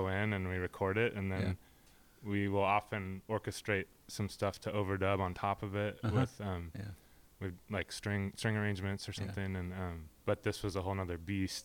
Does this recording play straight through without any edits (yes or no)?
no